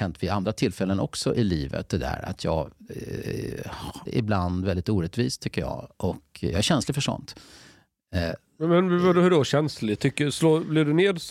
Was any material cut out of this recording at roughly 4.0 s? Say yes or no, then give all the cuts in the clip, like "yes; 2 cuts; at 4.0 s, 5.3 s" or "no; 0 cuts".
yes; 1 cut; at 4.0 s